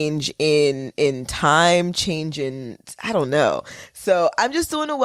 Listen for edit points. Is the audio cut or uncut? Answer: uncut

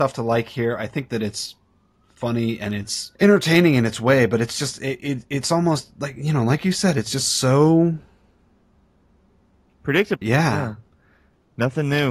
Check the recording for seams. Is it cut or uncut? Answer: cut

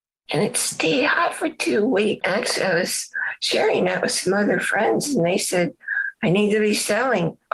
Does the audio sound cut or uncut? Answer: cut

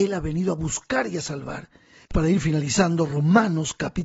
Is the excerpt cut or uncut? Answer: cut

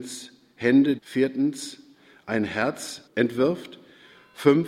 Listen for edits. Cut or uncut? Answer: cut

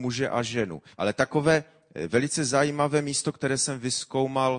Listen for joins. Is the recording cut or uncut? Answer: cut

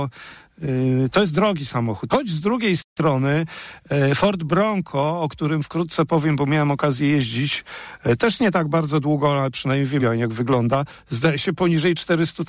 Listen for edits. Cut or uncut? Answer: cut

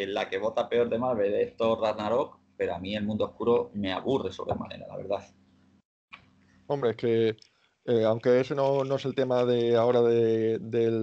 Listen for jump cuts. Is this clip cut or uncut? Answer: uncut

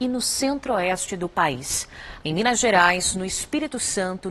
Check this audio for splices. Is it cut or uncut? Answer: cut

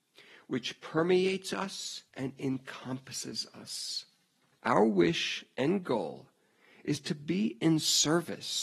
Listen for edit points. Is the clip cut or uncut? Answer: cut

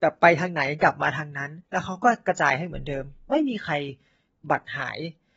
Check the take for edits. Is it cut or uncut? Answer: cut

